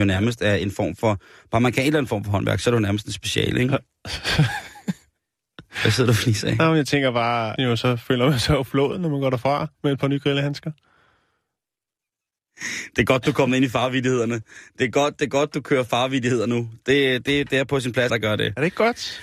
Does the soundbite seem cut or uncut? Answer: cut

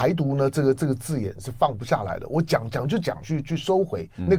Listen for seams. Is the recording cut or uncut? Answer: cut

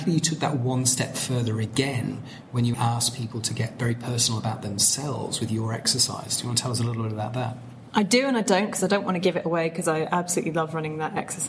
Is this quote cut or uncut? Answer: cut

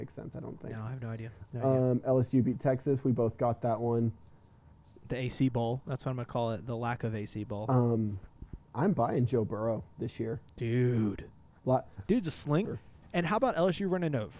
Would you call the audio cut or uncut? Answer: cut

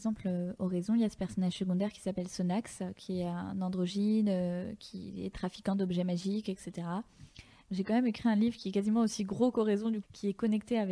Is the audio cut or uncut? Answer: cut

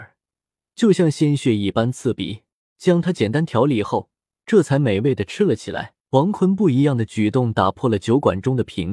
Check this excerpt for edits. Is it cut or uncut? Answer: cut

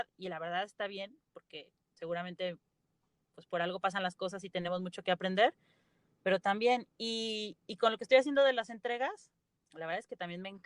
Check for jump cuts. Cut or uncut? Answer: uncut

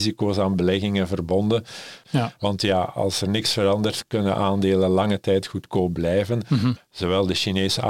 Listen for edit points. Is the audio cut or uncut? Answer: cut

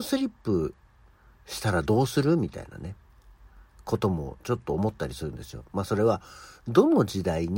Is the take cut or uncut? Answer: uncut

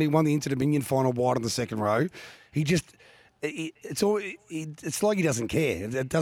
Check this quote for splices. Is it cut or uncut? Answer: uncut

